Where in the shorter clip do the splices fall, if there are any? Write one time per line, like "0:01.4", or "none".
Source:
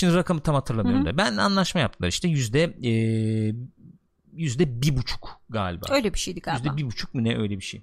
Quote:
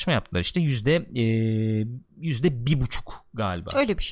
0:02.1

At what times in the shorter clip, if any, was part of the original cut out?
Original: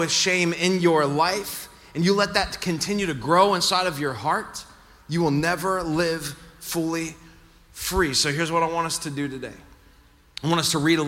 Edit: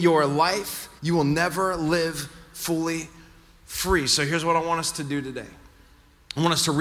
0:01.0

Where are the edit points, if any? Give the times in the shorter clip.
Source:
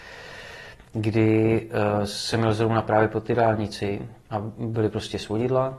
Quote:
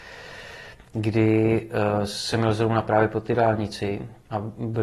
none

